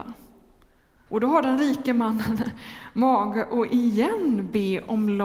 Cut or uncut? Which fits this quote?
cut